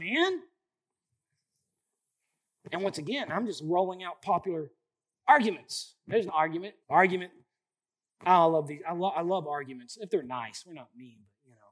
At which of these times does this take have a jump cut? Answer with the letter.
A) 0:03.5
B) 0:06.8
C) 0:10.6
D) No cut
B